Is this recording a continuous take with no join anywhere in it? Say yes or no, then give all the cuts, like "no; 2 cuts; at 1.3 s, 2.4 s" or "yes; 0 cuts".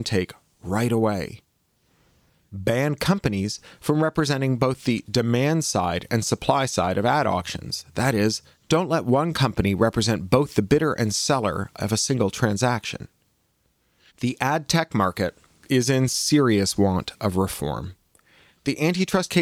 no; 1 cut; at 14.1 s